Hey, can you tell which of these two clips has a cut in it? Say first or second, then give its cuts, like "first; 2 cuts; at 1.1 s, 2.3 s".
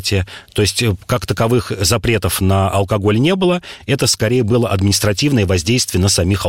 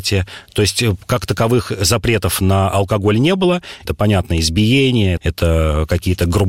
second; 2 cuts; at 3.9 s, 5.2 s